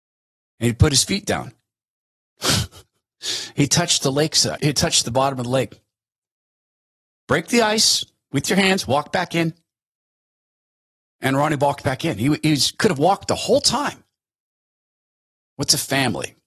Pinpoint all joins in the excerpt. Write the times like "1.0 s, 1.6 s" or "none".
4.6 s, 15.4 s

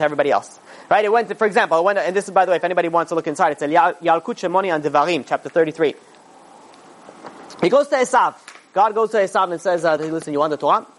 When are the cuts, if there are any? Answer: 10.0 s

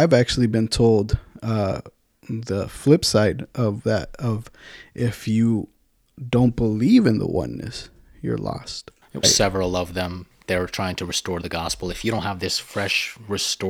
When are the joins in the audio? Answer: 9.2 s

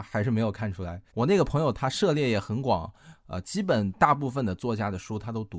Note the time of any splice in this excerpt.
1.1 s

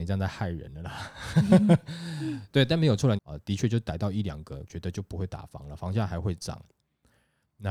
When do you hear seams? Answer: 3.2 s, 4.7 s

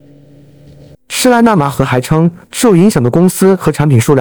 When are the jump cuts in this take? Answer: 0.9 s, 2.4 s

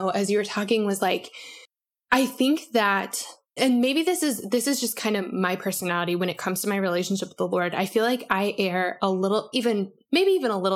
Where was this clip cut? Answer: 3.6 s, 9.5 s

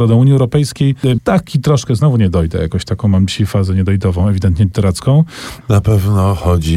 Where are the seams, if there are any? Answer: 1.2 s, 5.6 s

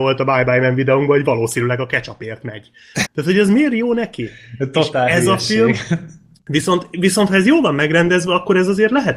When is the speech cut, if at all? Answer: 3.0 s

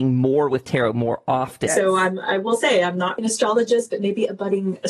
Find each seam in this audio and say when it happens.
1.7 s, 3.2 s

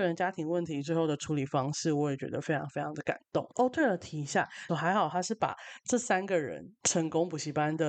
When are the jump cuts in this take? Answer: 3.5 s, 4.7 s

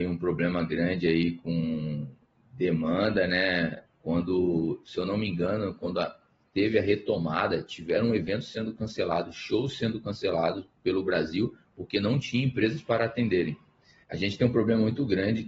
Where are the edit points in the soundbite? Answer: 3.9 s, 14.0 s

